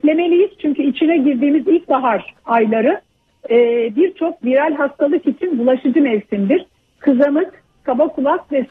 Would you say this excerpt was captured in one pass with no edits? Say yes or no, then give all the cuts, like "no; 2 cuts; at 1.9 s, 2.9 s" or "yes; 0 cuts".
no; 1 cut; at 7.8 s